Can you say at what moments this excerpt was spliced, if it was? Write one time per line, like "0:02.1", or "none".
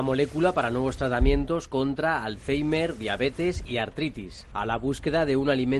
0:04.5